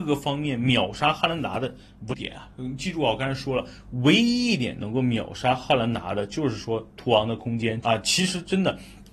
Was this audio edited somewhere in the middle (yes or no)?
yes